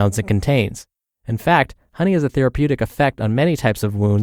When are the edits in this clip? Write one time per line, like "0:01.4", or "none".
0:01.1

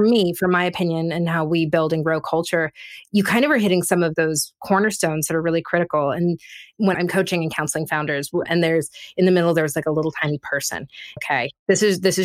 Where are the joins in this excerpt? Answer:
0:06.9
0:08.5
0:11.2

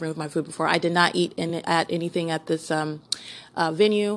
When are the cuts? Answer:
none

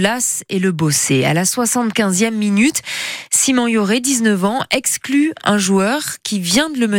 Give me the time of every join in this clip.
none

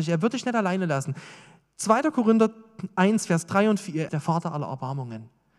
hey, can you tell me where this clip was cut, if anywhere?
0:04.1

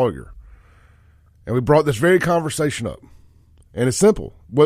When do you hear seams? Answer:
none

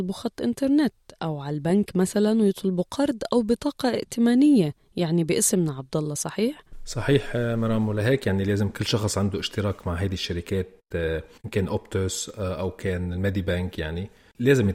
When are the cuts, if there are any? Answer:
none

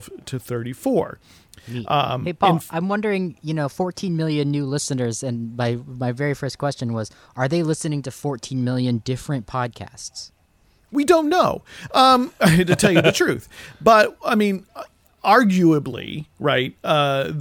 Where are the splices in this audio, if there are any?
none

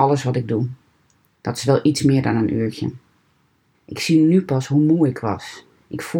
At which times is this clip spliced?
0:03.7

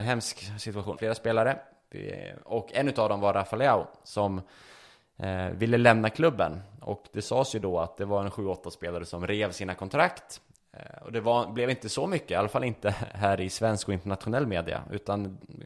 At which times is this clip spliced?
0:01.0

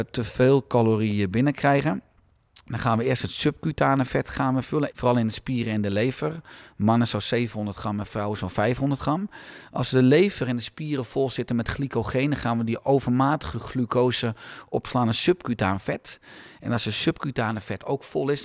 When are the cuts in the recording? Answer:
0:04.9

